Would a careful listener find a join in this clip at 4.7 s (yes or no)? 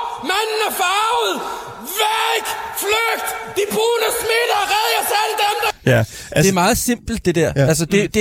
no